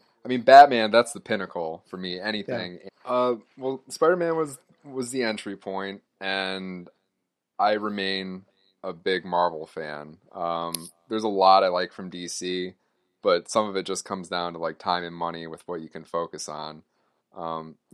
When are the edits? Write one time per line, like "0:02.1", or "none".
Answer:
0:02.9